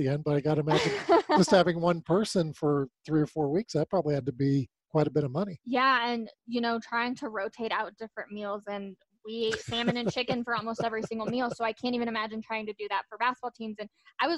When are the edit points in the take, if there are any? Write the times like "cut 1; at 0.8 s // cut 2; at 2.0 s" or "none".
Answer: none

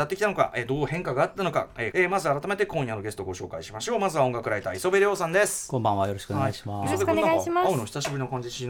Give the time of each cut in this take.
cut 1; at 1.9 s

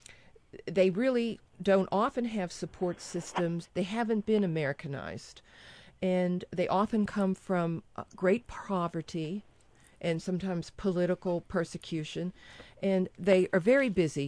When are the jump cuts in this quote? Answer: cut 1; at 3.6 s

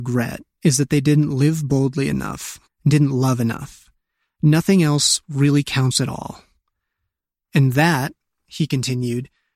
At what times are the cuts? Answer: cut 1; at 2.7 s

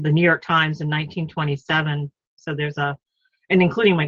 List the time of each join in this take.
cut 1; at 2.4 s

